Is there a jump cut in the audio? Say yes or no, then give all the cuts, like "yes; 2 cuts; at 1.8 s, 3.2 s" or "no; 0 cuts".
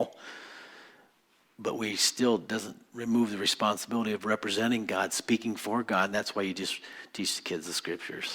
no; 0 cuts